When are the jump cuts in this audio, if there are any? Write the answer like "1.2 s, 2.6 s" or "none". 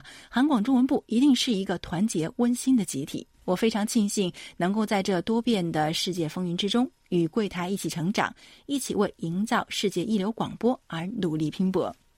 3.3 s